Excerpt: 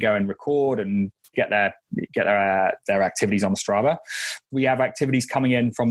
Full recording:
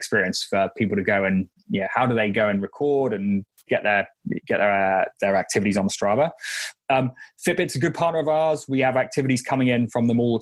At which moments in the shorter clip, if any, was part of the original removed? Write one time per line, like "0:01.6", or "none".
0:04.5